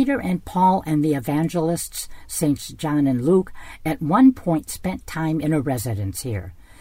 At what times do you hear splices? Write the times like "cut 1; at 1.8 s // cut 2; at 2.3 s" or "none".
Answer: none